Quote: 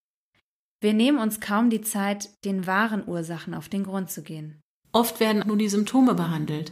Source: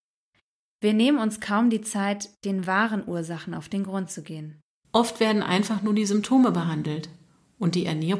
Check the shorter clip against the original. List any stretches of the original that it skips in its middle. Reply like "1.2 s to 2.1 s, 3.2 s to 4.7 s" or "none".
5.4 s to 5.8 s